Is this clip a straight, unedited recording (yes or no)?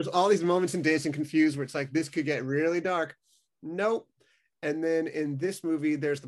yes